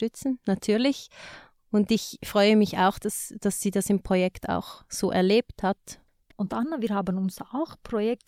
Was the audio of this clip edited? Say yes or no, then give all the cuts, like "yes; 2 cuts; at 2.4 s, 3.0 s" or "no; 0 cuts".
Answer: yes; 1 cut; at 3.0 s